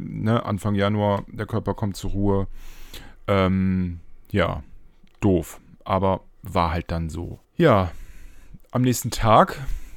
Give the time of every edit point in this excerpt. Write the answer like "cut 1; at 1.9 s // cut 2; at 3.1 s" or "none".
cut 1; at 7.4 s